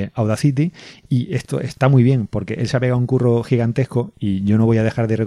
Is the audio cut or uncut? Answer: uncut